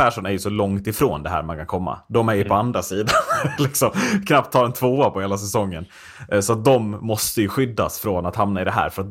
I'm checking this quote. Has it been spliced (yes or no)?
no